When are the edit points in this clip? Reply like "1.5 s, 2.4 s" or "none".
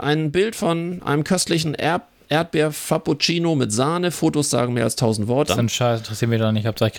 5.5 s